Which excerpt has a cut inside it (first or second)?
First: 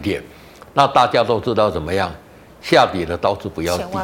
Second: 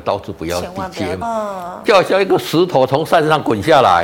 second